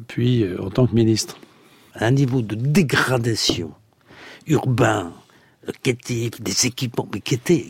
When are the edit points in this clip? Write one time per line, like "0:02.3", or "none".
0:01.9